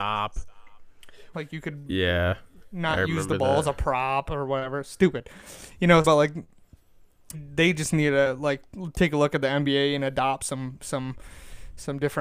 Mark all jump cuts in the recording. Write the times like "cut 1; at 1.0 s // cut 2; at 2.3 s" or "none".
cut 1; at 1.3 s // cut 2; at 6.0 s // cut 3; at 7.3 s